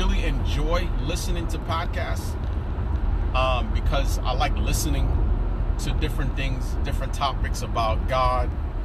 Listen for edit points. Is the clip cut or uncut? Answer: uncut